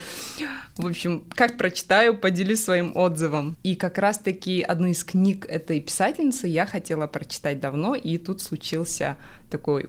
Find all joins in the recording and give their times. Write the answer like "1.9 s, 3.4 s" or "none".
3.5 s